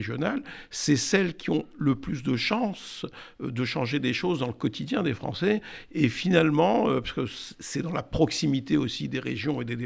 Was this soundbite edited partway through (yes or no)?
no